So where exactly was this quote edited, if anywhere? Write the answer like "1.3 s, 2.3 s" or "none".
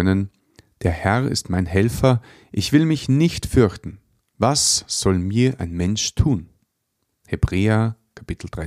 none